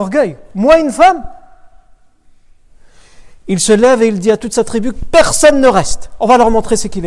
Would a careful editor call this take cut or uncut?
uncut